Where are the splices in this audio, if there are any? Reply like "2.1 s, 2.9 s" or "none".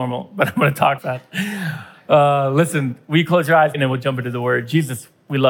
1.0 s, 3.7 s

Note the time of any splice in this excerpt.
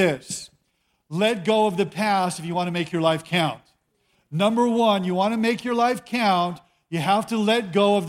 none

